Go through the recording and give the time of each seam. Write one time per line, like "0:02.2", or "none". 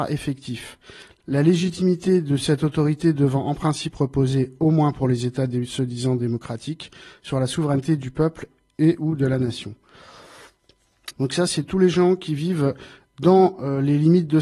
0:11.1